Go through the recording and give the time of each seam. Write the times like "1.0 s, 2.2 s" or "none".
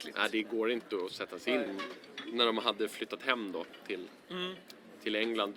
1.7 s